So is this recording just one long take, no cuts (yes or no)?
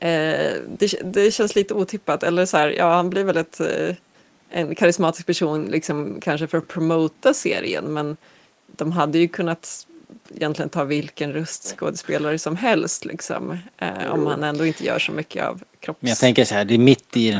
yes